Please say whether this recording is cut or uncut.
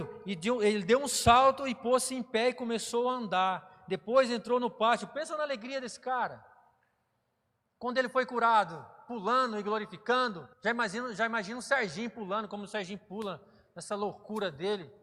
cut